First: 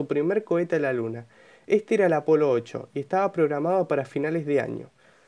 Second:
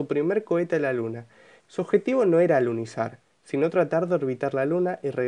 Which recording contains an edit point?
second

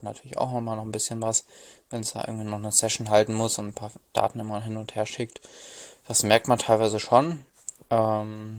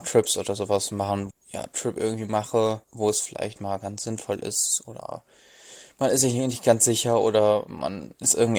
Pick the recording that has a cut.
second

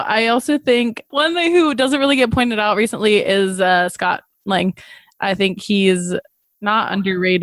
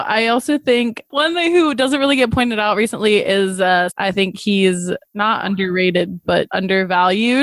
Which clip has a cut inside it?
second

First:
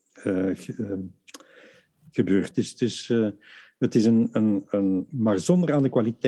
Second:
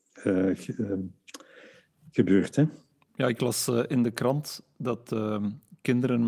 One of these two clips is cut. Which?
first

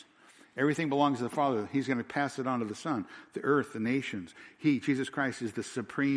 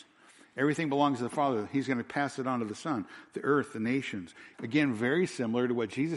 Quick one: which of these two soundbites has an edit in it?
second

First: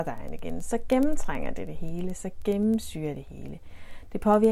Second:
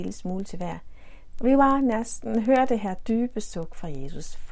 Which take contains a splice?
second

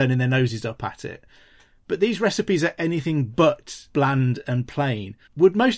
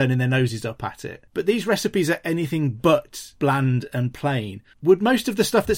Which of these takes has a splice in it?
second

